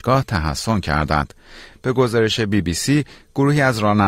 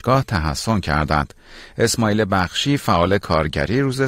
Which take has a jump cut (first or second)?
first